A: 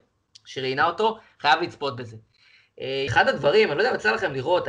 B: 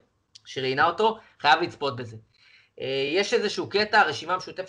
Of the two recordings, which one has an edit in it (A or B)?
A